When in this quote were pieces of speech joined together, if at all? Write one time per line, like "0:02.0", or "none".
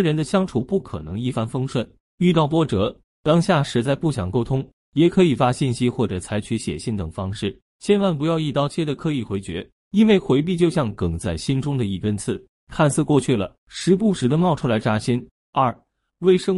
0:13.6
0:15.4